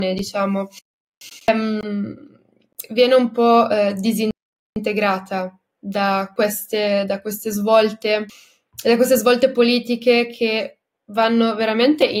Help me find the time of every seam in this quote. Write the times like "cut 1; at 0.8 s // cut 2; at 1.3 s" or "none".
none